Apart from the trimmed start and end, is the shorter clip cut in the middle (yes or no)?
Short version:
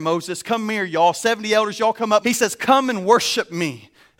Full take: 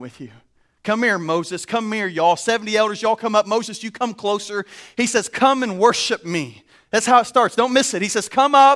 yes